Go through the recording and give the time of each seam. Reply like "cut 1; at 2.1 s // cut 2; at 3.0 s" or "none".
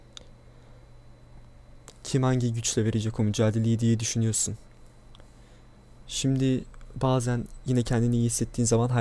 cut 1; at 1.9 s // cut 2; at 6.0 s